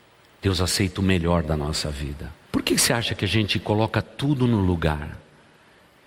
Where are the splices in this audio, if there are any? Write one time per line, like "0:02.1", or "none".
0:02.5